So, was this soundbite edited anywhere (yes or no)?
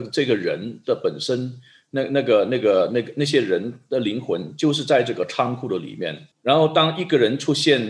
yes